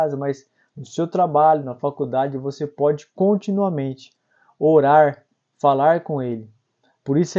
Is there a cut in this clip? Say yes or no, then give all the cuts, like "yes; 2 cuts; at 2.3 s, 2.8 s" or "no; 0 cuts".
no; 0 cuts